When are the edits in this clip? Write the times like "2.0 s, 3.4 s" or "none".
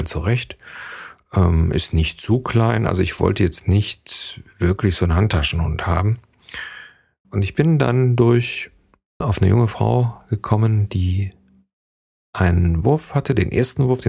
7.2 s, 9.2 s